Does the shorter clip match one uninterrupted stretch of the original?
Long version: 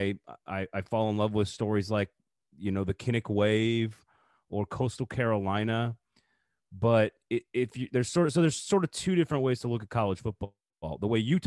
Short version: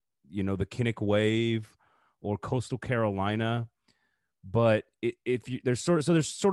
yes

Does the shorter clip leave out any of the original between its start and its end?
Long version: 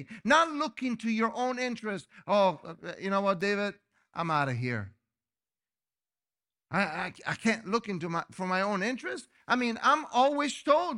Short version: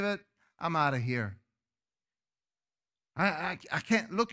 no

